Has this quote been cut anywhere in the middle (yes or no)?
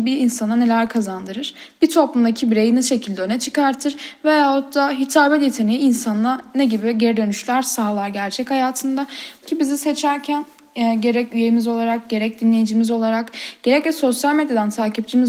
yes